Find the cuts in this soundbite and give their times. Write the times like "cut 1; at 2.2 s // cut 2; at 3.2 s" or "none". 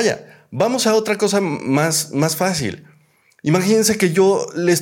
none